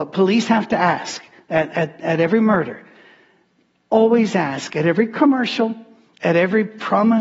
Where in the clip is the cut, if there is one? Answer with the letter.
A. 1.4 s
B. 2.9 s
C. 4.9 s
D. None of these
D